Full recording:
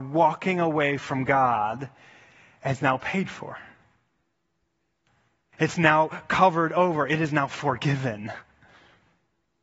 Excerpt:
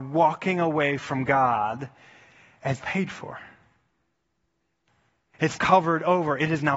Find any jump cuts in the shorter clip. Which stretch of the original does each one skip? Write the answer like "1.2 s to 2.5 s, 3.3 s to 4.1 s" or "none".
2.8 s to 3.0 s, 5.8 s to 6.3 s